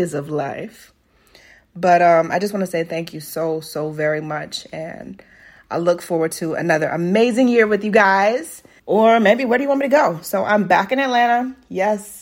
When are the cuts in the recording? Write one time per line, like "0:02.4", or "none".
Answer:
0:08.8